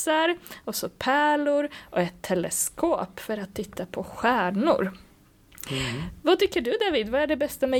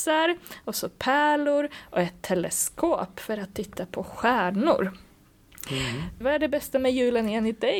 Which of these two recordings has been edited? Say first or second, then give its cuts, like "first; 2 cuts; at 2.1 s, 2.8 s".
second; 1 cut; at 6.2 s